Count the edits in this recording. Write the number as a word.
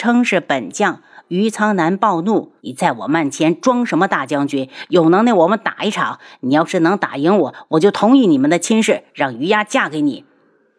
one